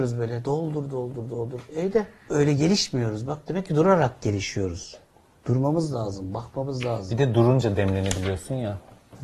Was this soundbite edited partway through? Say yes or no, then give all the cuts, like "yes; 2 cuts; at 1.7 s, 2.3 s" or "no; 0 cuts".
yes; 1 cut; at 2.3 s